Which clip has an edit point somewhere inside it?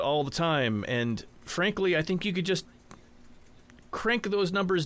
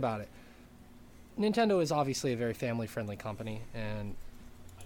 second; 1 cut; at 1.3 s

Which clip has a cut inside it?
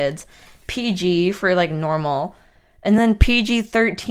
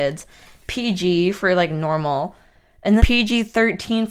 second; 1 cut; at 3.0 s

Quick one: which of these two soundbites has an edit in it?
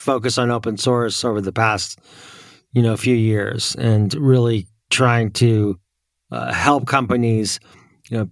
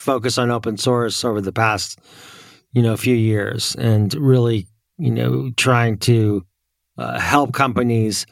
first; 1 cut; at 4.9 s

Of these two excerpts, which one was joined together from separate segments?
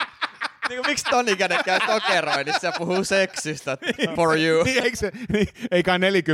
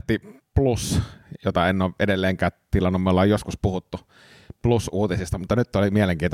first; 2 cuts; at 4.2 s, 5.3 s

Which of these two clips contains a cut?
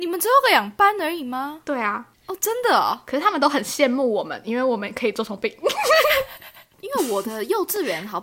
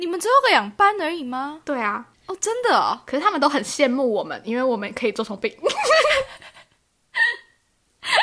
first; 1 cut; at 6.7 s

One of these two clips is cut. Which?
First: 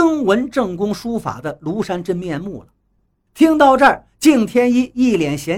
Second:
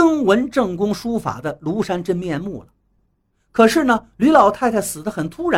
first; 1 cut; at 3.3 s

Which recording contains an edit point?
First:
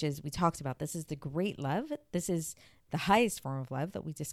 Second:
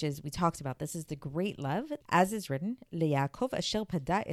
second; 1 cut; at 2.0 s

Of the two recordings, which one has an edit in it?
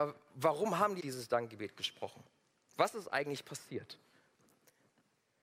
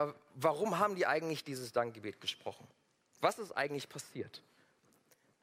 first; 1 cut; at 1.0 s

